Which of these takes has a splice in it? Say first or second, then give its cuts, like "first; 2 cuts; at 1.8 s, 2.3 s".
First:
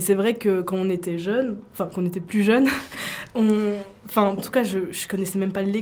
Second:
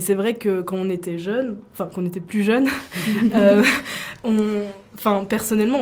first; 2 cuts; at 2.9 s, 4.4 s